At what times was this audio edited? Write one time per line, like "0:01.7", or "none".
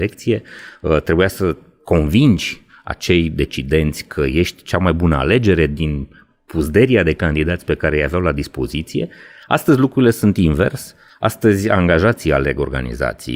none